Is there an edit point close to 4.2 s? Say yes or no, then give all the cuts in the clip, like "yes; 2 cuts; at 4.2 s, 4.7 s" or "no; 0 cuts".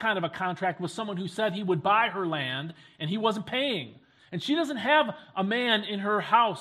yes; 1 cut; at 4.2 s